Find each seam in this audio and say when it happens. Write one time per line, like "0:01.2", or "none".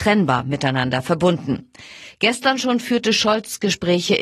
none